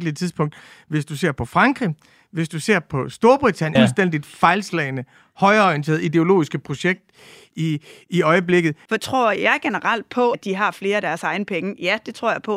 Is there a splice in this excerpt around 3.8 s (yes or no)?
yes